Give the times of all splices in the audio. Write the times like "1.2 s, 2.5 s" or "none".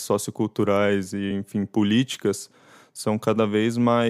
none

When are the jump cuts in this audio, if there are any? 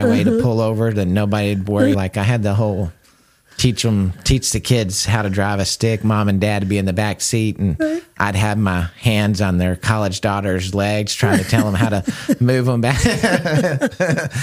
1.9 s

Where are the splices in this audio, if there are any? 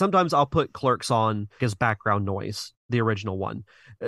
1.6 s

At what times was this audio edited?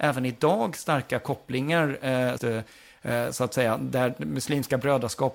2.4 s

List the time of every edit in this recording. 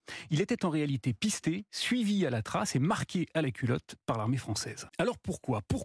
4.9 s

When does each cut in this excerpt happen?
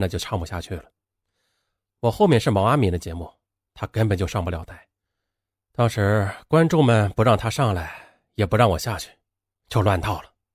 none

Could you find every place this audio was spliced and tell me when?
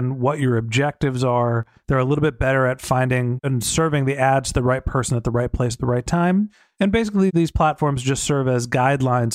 none

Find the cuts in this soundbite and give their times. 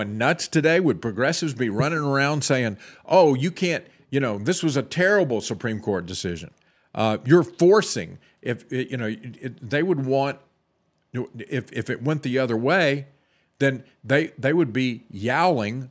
none

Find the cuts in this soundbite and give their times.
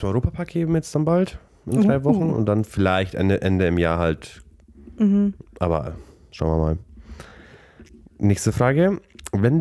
none

